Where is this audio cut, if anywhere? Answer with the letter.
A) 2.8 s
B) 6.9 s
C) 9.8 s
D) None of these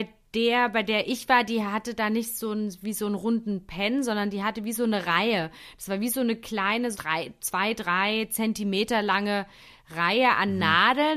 B